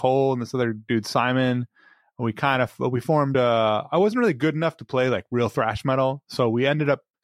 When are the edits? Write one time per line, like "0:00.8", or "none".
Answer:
none